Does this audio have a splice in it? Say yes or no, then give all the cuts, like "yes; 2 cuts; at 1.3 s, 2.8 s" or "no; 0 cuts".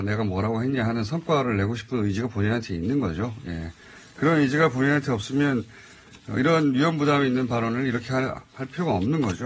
no; 0 cuts